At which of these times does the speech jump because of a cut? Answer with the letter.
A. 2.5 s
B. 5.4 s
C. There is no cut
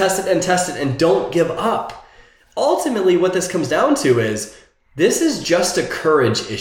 C